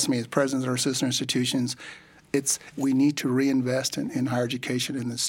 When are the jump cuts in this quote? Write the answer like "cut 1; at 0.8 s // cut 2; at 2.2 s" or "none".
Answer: cut 1; at 2.7 s